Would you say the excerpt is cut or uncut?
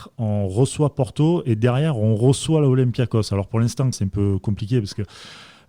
cut